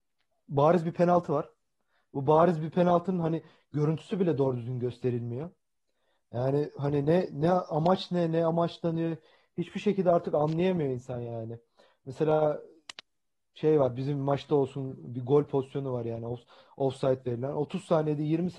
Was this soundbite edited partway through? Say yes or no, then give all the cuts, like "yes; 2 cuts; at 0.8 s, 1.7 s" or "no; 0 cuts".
no; 0 cuts